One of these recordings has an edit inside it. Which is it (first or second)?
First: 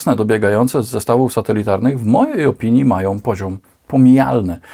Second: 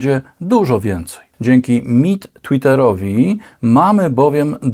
second